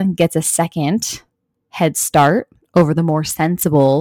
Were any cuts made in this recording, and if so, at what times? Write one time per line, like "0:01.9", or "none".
none